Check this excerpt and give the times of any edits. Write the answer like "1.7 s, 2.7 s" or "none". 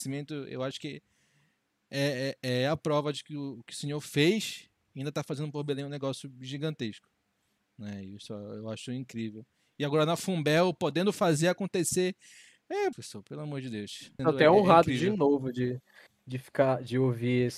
12.9 s, 14.2 s

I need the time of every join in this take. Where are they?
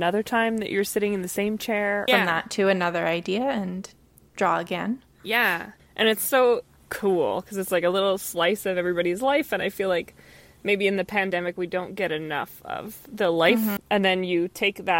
2.1 s, 13.8 s

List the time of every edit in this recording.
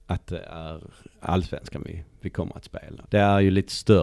3.0 s

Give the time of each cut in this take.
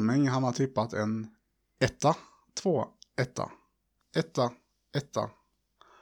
4.0 s

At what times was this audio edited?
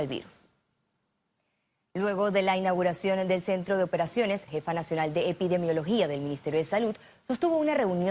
4.5 s

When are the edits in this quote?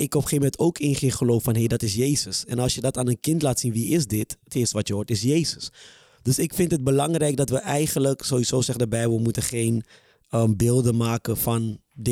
none

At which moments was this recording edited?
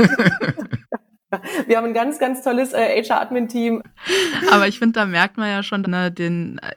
3.8 s, 5.8 s

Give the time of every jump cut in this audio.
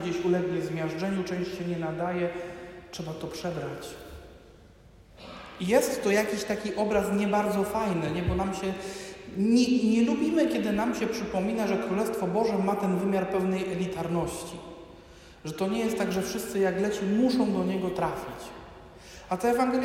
none

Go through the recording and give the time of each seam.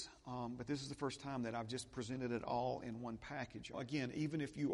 3.7 s

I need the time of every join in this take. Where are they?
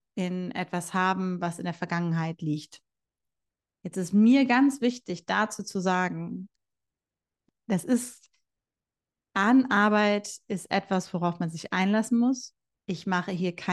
none

